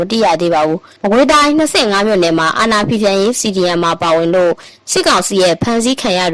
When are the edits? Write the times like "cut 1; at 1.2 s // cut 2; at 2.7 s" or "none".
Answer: cut 1; at 1.0 s